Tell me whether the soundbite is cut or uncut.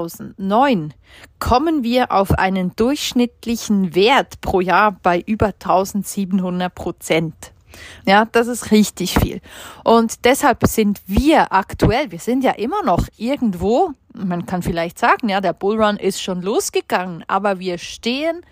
cut